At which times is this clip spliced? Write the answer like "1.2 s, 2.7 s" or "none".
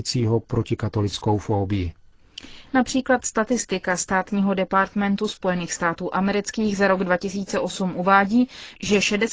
2.7 s